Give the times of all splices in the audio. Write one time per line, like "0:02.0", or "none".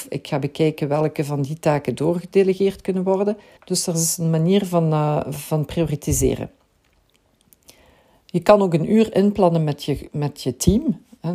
0:03.6